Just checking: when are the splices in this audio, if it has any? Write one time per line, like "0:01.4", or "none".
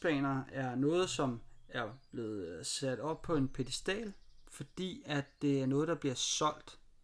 none